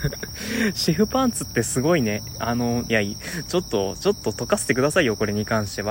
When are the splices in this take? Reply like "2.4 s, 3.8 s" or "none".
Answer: 2.8 s